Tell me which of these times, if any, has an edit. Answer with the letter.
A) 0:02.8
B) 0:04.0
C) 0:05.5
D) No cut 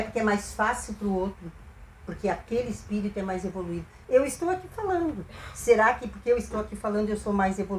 B